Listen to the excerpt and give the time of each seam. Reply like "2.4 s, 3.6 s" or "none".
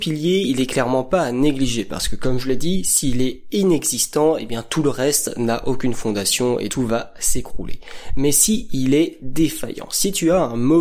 6.7 s